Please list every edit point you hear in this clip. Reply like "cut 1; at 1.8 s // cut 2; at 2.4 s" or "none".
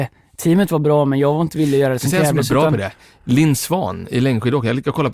none